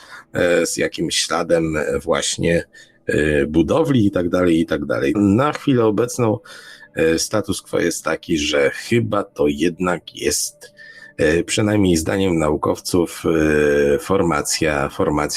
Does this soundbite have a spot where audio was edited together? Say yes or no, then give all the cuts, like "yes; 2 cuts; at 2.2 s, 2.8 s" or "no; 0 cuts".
yes; 1 cut; at 5.1 s